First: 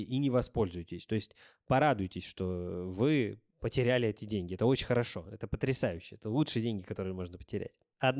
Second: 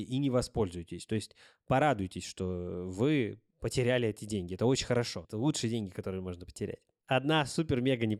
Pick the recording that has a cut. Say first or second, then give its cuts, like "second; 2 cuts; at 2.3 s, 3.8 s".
second; 1 cut; at 5.2 s